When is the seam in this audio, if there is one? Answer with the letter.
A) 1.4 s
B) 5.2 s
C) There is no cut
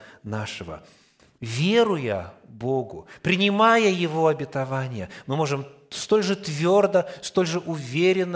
A